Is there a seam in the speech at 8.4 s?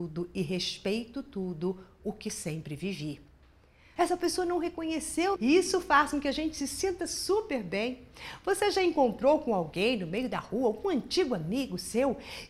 no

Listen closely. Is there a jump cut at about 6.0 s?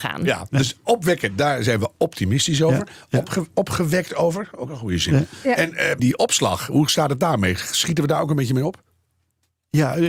yes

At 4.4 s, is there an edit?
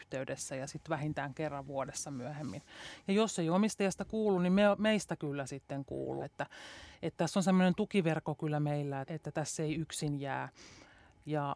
no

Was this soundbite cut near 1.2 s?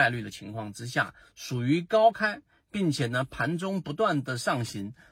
no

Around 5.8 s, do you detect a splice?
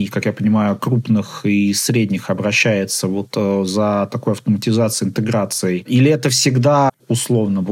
no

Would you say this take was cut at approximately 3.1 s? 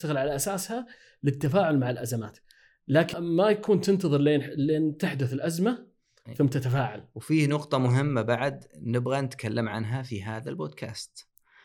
yes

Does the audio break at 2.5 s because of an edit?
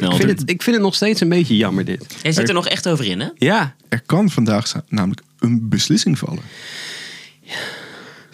no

